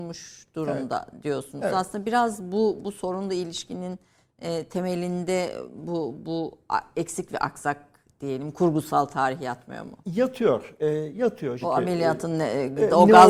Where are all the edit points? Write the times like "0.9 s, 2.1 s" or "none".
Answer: 11.6 s

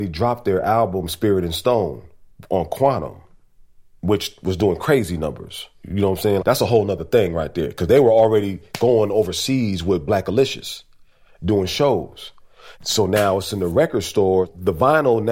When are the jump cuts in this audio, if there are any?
6.4 s, 12.7 s

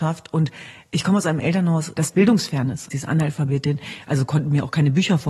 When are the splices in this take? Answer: 2.9 s

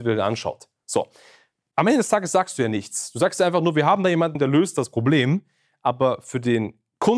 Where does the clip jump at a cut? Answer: 4.3 s

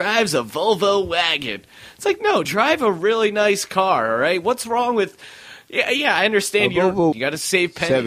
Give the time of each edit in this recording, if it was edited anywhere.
2.4 s, 7.1 s

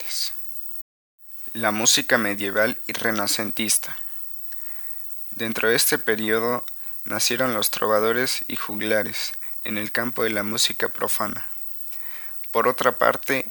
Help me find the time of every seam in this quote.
5.2 s

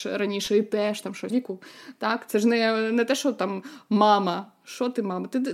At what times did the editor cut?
1.3 s

